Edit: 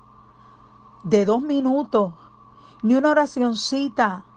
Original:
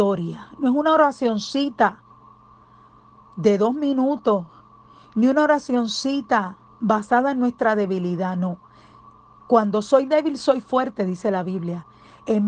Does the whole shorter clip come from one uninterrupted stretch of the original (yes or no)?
yes